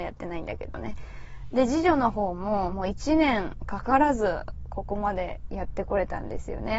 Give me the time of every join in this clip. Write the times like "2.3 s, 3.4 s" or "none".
2.7 s